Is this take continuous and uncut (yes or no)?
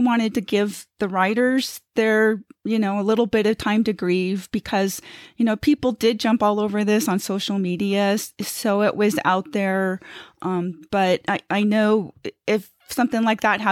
yes